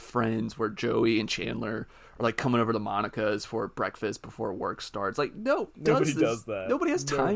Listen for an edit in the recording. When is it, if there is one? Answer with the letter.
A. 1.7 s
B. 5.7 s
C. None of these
B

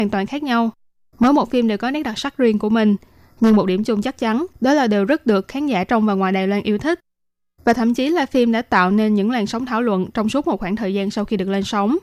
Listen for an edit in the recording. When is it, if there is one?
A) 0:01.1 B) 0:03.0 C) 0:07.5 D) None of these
D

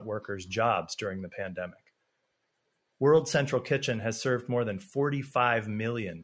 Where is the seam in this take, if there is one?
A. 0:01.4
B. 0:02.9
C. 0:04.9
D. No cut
B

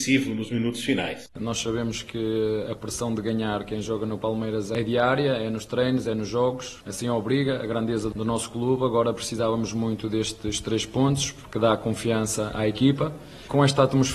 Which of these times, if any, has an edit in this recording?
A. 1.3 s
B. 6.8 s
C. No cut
A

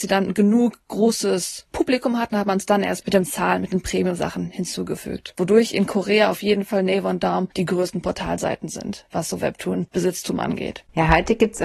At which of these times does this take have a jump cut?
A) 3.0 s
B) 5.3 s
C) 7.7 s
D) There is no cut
A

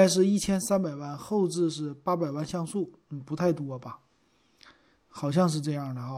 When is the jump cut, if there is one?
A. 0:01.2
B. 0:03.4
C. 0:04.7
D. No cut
D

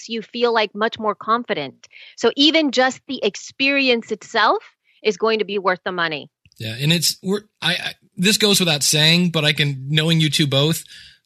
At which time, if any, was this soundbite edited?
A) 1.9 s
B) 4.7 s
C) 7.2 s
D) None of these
D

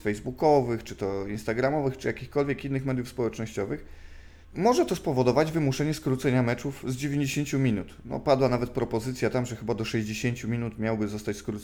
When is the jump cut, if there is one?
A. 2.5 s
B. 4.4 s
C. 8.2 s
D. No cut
B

